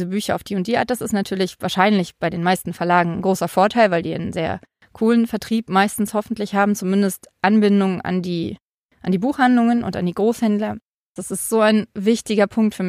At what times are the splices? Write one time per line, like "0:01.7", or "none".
0:11.2